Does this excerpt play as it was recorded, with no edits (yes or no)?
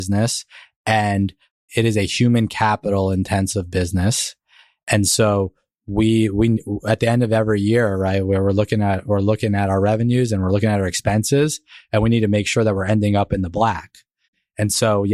yes